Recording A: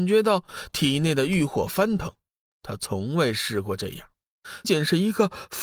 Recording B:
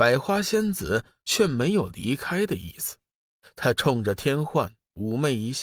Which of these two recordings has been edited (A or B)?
A